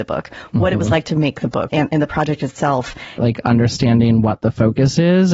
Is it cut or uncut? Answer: cut